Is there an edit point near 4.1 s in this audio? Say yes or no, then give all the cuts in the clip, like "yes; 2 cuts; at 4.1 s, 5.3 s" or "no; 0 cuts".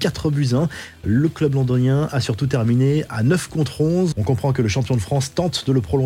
yes; 1 cut; at 4.1 s